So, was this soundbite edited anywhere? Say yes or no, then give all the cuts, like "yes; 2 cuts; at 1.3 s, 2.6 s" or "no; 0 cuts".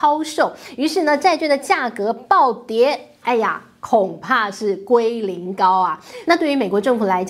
yes; 2 cuts; at 3.2 s, 6.2 s